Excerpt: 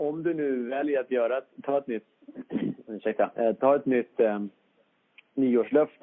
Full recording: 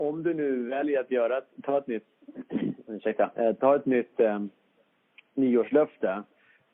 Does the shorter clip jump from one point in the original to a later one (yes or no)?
no